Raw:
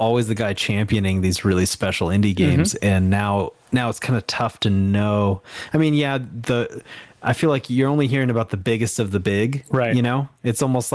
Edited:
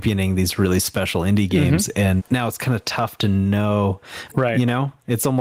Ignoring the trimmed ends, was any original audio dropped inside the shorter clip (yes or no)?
yes